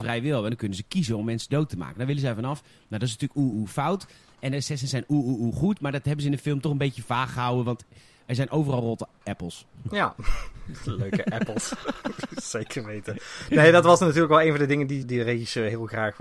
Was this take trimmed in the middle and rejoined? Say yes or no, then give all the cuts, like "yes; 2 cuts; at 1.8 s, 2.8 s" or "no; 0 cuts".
yes; 2 cuts; at 3.5 s, 15.0 s